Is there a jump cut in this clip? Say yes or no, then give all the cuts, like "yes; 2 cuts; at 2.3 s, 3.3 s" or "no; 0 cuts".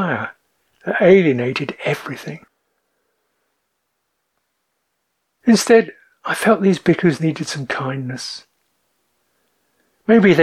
no; 0 cuts